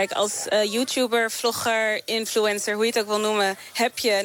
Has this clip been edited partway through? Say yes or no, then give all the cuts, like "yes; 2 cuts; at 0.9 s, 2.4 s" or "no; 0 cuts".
no; 0 cuts